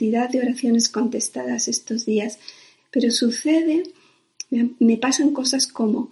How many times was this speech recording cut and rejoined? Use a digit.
1